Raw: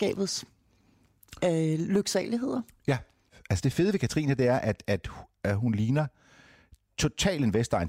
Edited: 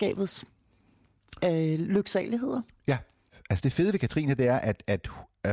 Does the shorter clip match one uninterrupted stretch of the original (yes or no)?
yes